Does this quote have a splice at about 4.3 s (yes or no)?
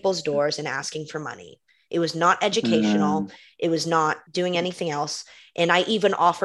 yes